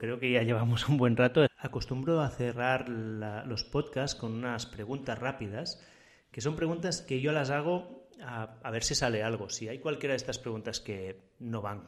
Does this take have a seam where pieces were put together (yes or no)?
yes